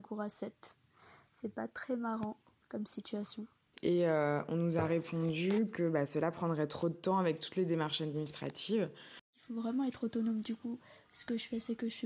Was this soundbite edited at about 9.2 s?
yes; 2 cuts; at 3.7 s, 9.2 s

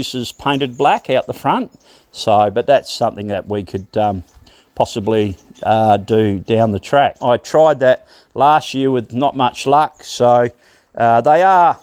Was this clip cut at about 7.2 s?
yes; 1 cut; at 7.2 s

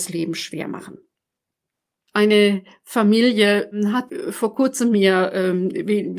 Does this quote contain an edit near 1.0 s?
no; 0 cuts

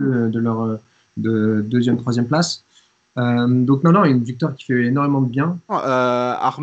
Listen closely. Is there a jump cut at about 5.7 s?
yes; 1 cut; at 5.7 s

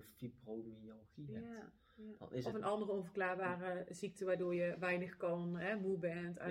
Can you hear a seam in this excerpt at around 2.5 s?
no; 0 cuts

